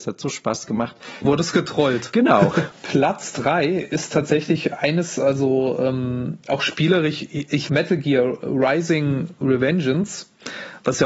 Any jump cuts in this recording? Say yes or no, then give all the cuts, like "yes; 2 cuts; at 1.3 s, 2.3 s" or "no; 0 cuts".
yes; 3 cuts; at 1.2 s, 2.7 s, 7.7 s